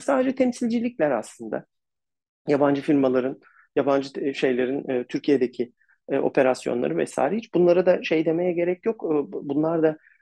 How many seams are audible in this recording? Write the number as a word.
zero